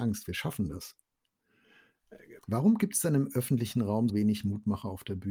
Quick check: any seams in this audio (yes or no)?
yes